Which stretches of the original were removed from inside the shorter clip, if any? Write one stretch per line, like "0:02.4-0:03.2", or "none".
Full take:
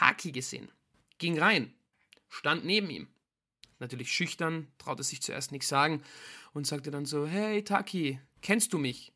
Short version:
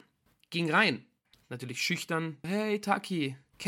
0:02.0-0:03.6
0:04.7-0:07.3